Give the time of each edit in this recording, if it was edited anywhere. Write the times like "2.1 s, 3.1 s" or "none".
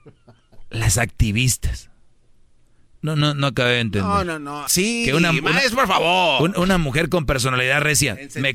4.7 s